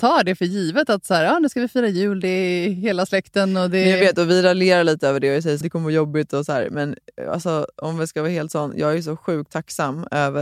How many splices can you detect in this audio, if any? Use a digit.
1